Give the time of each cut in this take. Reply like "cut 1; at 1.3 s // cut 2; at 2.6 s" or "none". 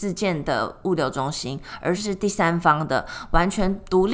cut 1; at 2.0 s